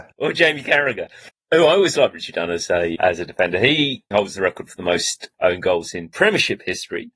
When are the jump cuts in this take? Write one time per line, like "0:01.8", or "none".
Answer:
0:01.3
0:03.0
0:04.1